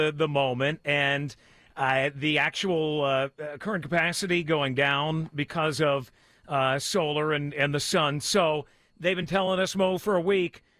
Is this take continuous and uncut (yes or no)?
yes